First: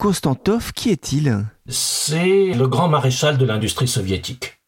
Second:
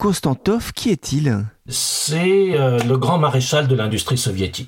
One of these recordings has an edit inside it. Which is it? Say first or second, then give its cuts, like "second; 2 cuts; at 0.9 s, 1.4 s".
first; 1 cut; at 2.5 s